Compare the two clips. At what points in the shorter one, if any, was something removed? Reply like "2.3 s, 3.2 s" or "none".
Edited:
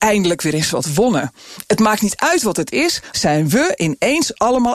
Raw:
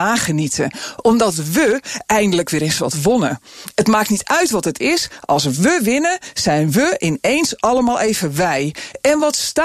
3.1 s